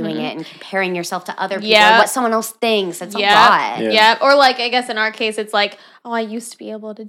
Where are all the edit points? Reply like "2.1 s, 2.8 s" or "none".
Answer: none